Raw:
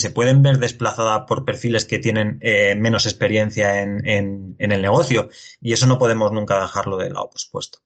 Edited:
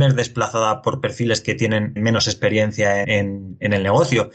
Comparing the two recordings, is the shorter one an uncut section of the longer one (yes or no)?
no